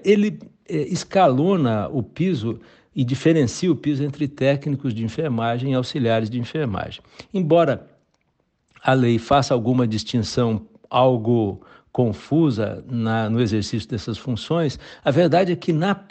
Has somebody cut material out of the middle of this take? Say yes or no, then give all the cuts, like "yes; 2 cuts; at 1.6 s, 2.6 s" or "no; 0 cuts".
no; 0 cuts